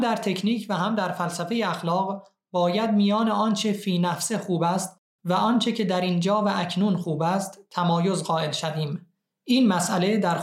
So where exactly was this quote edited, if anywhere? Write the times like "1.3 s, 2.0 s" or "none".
none

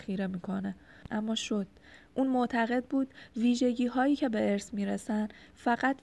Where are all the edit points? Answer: 1.1 s

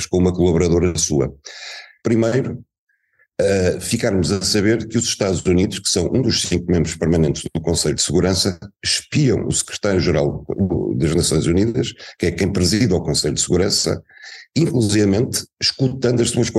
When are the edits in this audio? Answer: 2.0 s

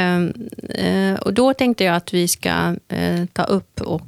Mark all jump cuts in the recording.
none

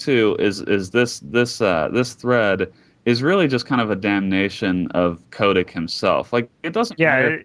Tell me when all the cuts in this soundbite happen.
none

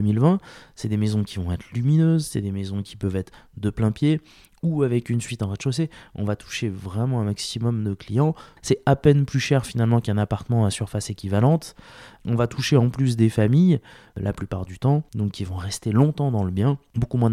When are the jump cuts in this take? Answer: 8.6 s

